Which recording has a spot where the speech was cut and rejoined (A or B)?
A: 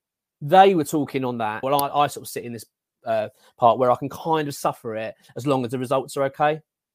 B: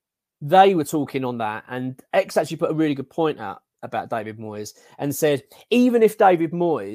A